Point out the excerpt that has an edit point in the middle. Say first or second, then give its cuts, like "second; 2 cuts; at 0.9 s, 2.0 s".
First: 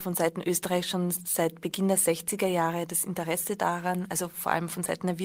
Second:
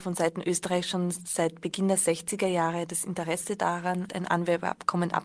second; 1 cut; at 4.1 s